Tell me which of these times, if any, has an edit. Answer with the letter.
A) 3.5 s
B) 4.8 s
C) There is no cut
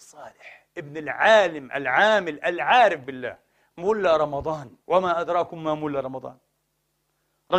B